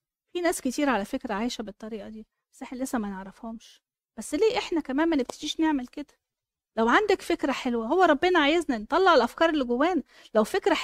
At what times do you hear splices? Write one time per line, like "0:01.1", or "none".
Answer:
none